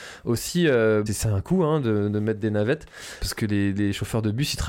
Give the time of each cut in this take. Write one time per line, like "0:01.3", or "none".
0:01.1
0:03.2

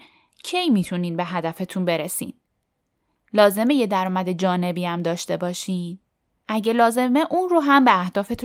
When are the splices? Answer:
none

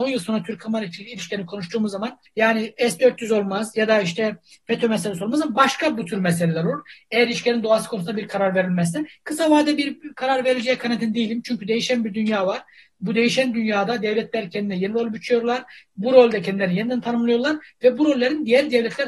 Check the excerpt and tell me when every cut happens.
none

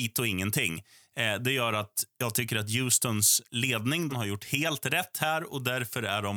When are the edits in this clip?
0:04.1

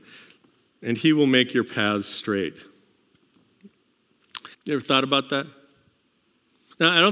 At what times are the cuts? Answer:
0:04.5

